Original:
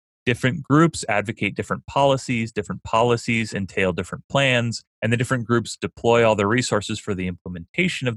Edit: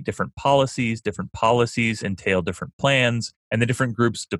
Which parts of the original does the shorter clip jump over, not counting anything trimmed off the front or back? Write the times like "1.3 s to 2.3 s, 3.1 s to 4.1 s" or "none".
none